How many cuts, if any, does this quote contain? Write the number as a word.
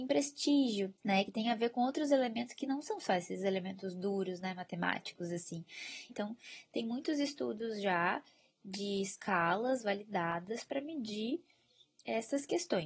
two